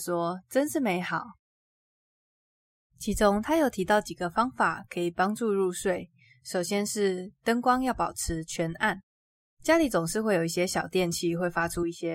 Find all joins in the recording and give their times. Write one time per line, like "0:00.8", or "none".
none

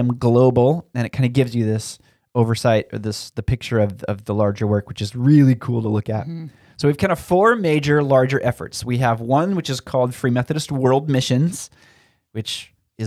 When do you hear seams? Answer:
none

